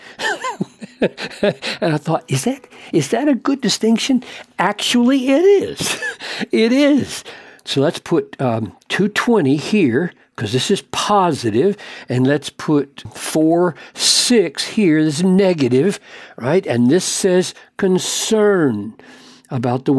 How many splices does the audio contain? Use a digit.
2